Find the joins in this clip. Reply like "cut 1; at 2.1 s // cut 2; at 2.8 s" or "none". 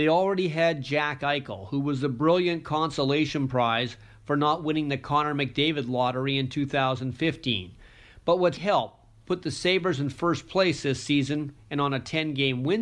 cut 1; at 8.6 s

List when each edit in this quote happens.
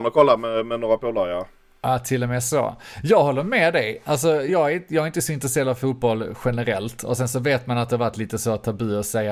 cut 1; at 4.5 s

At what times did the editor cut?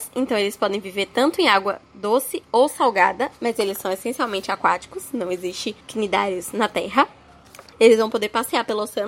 cut 1; at 5.8 s // cut 2; at 7.7 s

